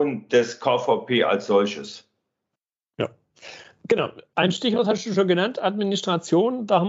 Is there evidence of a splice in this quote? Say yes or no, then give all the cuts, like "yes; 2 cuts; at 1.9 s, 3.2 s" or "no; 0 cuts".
no; 0 cuts